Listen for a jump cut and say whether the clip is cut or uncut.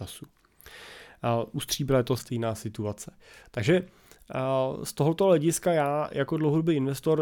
cut